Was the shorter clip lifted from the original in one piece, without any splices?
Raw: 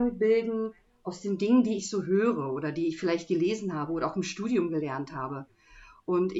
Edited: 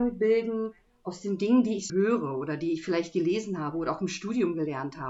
no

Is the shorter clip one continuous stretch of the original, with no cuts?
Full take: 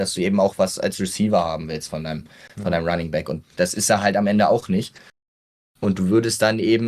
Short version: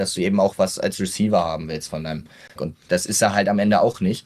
no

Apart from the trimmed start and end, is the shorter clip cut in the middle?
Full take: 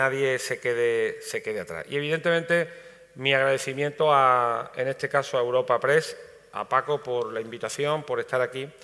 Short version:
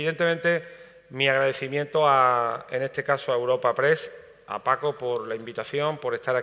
no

